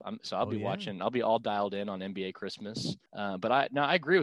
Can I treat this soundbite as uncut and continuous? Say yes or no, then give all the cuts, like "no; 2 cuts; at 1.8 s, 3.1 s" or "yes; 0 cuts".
no; 1 cut; at 3.1 s